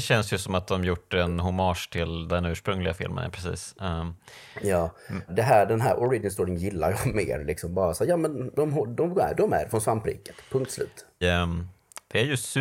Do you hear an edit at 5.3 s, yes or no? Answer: yes